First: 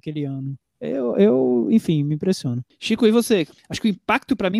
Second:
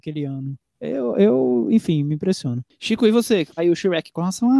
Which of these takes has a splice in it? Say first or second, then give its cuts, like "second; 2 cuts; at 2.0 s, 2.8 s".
second; 1 cut; at 3.6 s